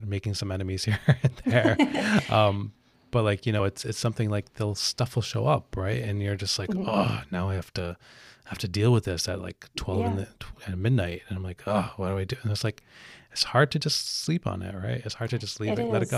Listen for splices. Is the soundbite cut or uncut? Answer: uncut